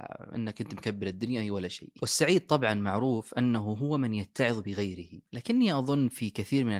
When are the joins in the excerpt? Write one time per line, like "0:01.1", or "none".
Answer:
0:05.3